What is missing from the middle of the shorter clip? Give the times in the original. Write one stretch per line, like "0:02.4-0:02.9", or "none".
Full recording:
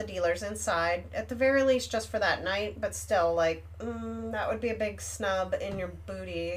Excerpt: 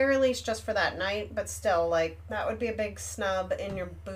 0:03.8-0:04.3